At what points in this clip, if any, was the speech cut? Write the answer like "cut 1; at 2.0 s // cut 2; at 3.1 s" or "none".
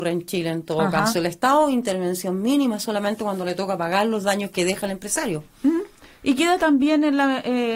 none